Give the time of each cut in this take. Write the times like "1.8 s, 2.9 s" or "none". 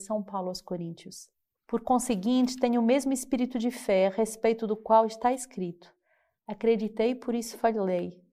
none